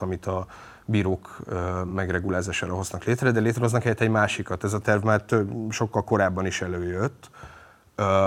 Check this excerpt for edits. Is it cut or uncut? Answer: uncut